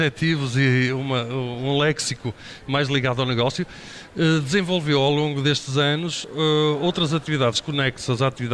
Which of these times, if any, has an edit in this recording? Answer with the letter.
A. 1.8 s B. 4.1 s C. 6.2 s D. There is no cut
D